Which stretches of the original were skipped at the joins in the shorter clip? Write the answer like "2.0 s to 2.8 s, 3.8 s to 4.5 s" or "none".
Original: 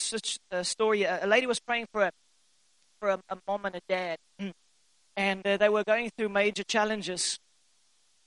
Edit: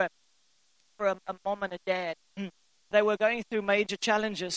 4.9 s to 5.6 s